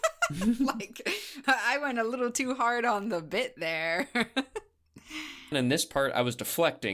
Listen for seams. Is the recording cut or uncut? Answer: cut